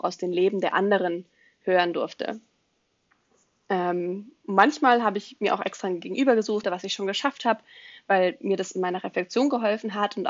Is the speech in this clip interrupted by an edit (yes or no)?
yes